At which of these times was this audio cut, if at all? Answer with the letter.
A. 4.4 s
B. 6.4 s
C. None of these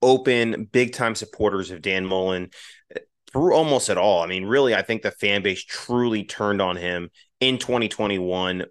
C